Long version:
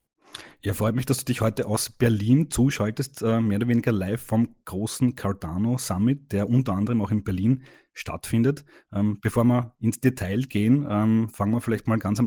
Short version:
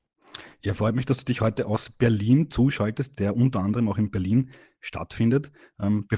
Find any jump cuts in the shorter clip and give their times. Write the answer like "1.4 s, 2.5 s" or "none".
3.1 s